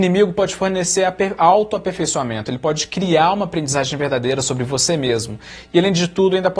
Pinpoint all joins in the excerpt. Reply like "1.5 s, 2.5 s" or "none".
none

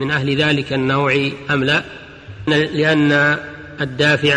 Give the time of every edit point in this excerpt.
2.5 s

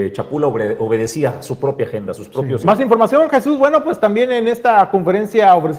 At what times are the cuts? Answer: 2.6 s

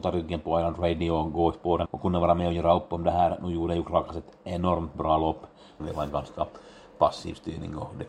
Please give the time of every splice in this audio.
1.9 s, 5.8 s

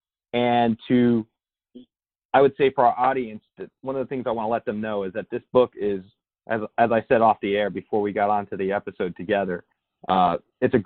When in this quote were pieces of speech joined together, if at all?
none

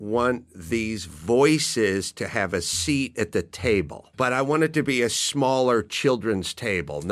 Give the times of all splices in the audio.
4.1 s

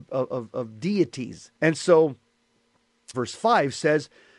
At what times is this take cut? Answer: 1.6 s, 3.1 s

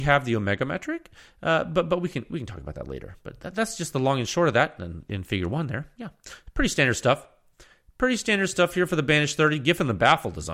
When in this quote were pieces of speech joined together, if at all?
none

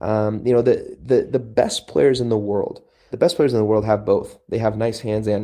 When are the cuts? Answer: 3.1 s

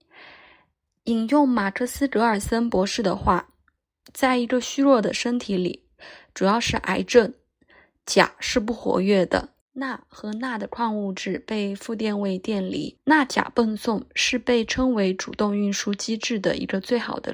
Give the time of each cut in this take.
9.6 s, 13.0 s

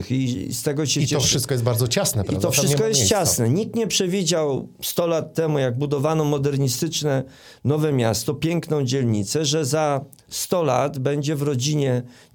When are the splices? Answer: none

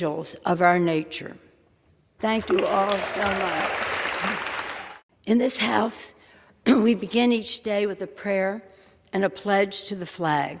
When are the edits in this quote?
2.2 s

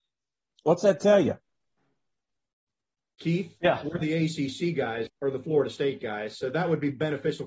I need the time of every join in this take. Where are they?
5.1 s

